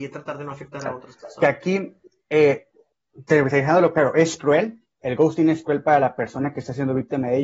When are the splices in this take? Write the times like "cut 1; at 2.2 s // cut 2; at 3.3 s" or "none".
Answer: none